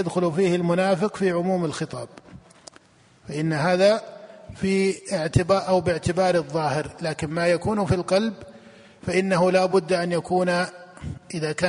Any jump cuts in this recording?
no; 0 cuts

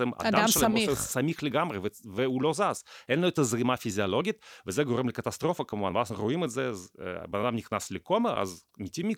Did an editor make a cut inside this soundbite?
no; 0 cuts

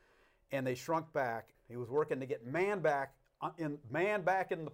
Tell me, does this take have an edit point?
yes; 1 cut; at 1.5 s

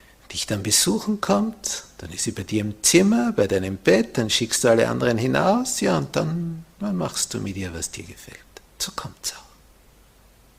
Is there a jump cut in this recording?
yes; 1 cut; at 8.7 s

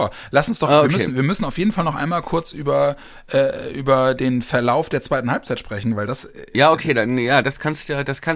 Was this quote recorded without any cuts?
yes; 0 cuts

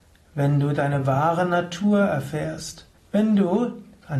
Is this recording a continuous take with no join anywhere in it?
no; 1 cut; at 3.0 s

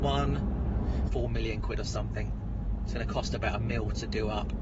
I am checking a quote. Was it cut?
yes; 1 cut; at 1.1 s

